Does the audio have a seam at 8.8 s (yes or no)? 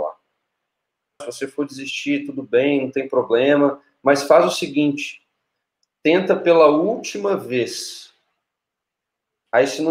no